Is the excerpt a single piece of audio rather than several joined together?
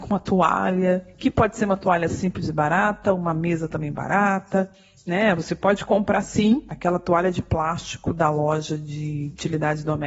yes; 0 cuts

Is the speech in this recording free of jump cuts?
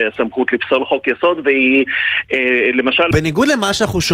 no; 1 cut; at 3.1 s

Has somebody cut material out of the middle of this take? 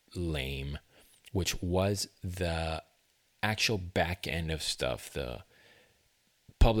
no; 0 cuts

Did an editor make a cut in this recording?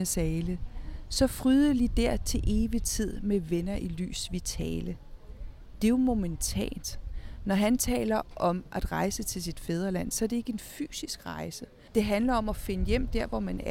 yes; 1 cut; at 11.9 s

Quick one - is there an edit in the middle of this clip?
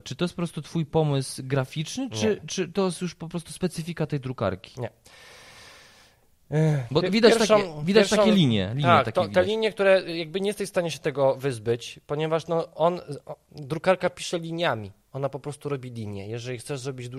no; 0 cuts

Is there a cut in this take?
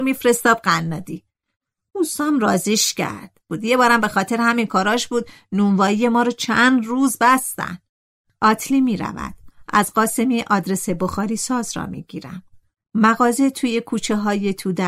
no; 0 cuts

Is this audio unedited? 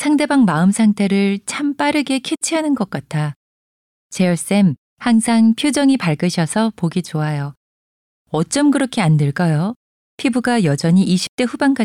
yes; 0 cuts

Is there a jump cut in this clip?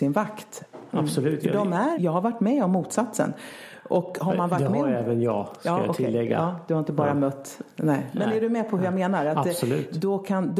yes; 1 cut; at 1.9 s

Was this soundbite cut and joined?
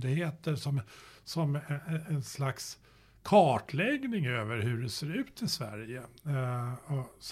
no; 0 cuts

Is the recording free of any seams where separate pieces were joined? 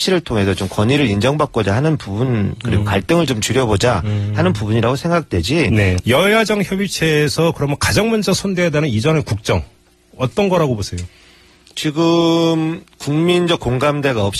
no; 1 cut; at 6.0 s

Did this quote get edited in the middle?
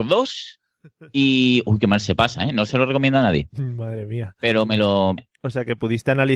yes; 1 cut; at 5.2 s

